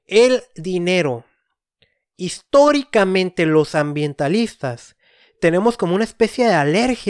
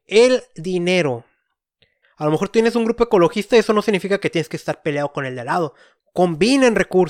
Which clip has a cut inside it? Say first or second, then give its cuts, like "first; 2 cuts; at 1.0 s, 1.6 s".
second; 2 cuts; at 2.0 s, 6.0 s